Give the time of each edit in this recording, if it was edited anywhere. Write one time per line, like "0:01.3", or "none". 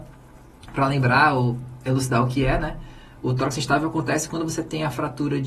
none